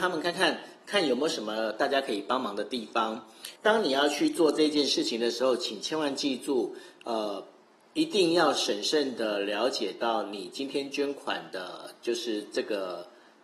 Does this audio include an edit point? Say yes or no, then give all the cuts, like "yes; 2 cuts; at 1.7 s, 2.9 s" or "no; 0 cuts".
yes; 1 cut; at 3.6 s